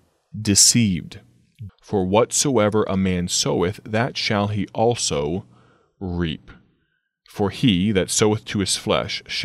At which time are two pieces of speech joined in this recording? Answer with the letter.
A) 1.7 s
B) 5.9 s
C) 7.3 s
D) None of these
A